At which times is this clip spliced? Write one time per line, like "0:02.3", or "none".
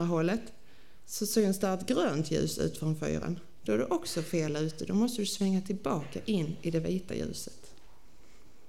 none